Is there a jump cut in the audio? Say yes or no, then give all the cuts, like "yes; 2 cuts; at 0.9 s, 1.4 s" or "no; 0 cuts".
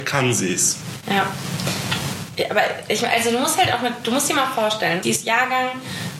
yes; 2 cuts; at 1.0 s, 5.0 s